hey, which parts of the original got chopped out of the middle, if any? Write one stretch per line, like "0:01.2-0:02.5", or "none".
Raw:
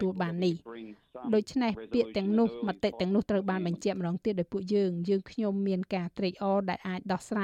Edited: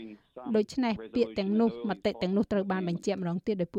none